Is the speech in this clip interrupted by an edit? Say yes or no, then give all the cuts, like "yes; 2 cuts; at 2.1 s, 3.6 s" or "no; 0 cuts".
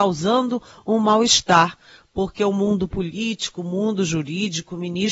no; 0 cuts